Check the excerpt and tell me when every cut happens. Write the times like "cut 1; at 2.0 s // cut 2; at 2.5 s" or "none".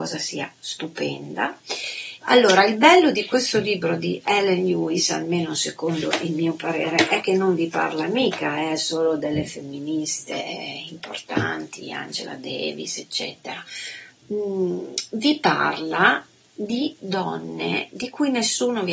cut 1; at 2.2 s